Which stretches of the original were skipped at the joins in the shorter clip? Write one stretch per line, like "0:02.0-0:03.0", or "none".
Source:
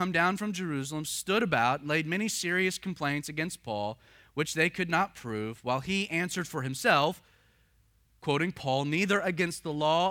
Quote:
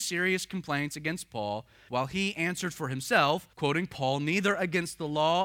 0:04.2-0:05.6
0:07.3-0:08.2